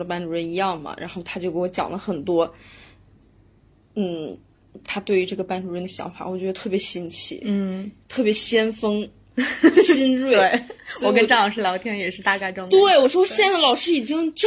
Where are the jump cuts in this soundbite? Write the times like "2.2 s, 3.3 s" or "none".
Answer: none